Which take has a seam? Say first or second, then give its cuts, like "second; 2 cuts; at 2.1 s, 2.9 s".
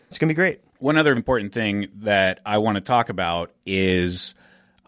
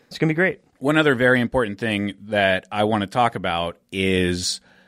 first; 1 cut; at 1.2 s